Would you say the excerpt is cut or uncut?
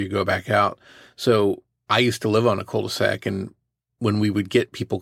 uncut